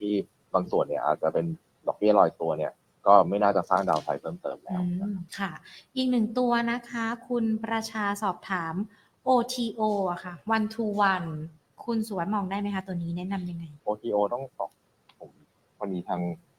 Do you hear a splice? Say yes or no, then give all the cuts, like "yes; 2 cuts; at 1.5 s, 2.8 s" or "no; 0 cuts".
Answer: yes; 2 cuts; at 5.3 s, 13.8 s